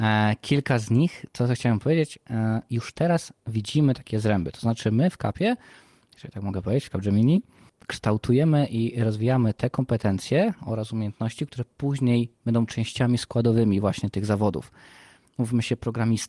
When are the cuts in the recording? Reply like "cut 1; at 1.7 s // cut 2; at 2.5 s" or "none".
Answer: none